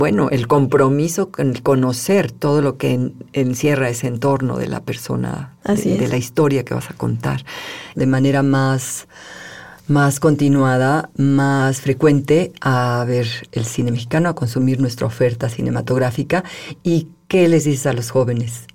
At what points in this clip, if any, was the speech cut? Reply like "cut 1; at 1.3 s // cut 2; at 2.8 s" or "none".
cut 1; at 8.0 s